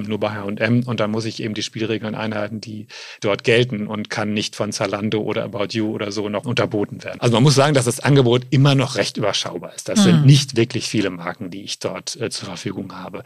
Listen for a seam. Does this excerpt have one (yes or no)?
yes